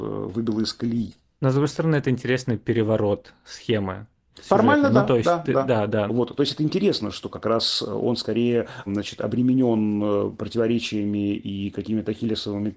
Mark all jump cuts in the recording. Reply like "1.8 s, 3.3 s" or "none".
6.1 s